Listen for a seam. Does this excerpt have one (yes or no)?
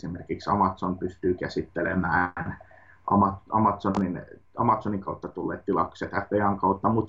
no